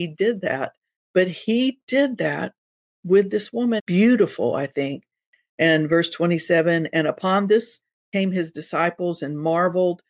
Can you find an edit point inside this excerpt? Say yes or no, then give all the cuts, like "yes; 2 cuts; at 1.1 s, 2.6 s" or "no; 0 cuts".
yes; 1 cut; at 3.8 s